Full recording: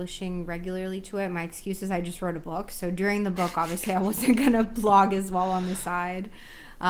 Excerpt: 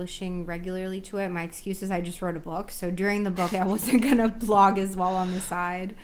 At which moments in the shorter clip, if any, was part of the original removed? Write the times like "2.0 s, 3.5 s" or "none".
3.5 s